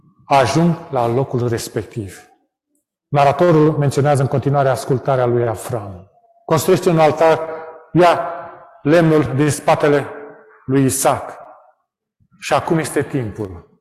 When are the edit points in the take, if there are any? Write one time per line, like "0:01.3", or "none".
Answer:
none